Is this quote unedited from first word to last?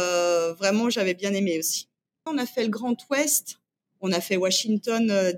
no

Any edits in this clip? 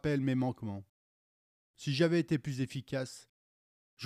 no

